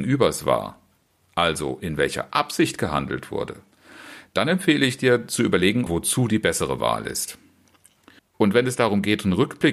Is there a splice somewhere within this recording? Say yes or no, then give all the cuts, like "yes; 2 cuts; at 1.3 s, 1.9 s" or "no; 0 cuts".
yes; 2 cuts; at 5.9 s, 8.2 s